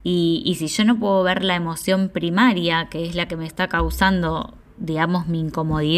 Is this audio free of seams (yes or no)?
yes